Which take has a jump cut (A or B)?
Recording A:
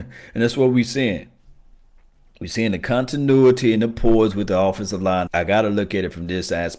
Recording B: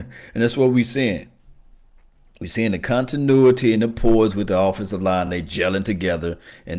A